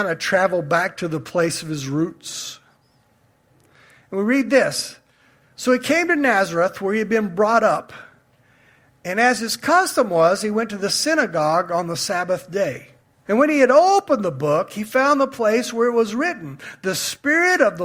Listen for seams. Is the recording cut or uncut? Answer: cut